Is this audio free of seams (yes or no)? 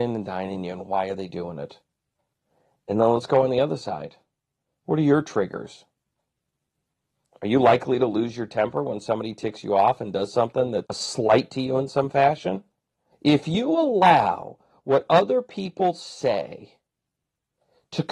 no